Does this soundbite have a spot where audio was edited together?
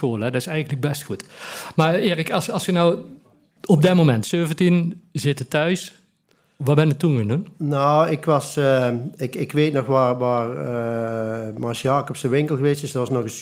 no; 0 cuts

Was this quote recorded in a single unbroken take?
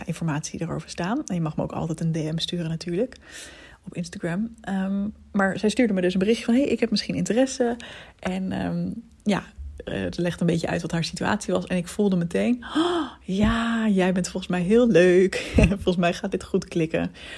yes; 0 cuts

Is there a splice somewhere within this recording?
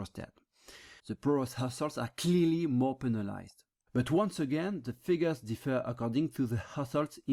yes; 2 cuts; at 1.0 s, 3.9 s

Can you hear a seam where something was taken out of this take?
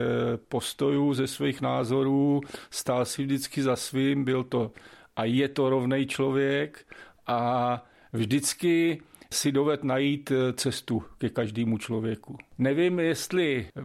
no; 0 cuts

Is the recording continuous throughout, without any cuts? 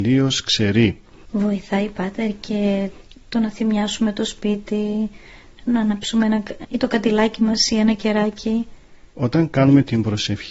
no; 2 cuts; at 1.2 s, 6.6 s

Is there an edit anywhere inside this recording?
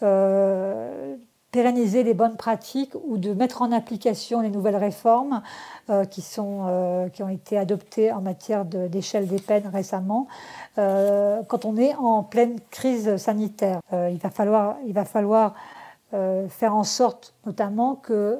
yes; 1 cut; at 13.8 s

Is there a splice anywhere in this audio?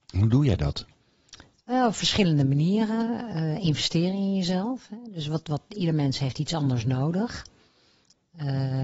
no; 0 cuts

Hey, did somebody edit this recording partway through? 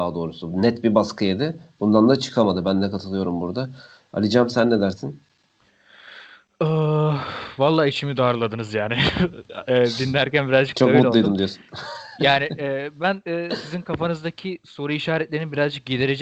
no; 0 cuts

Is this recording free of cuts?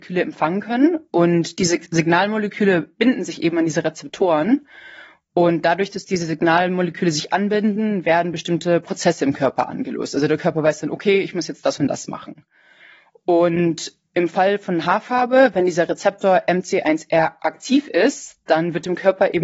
yes; 0 cuts

